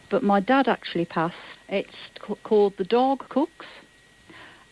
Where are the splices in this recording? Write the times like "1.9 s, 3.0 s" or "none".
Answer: 1.6 s, 3.3 s